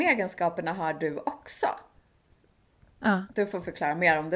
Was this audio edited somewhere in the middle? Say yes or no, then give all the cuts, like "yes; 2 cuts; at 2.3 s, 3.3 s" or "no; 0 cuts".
no; 0 cuts